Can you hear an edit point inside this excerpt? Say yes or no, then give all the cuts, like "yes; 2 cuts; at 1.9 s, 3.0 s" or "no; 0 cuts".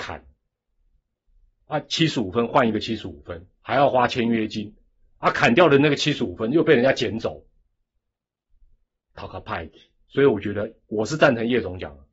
no; 0 cuts